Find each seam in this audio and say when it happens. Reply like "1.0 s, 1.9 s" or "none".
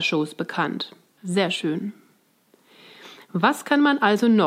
1.2 s